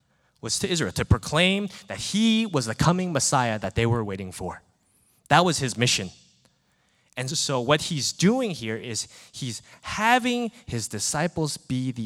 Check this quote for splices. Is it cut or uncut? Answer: uncut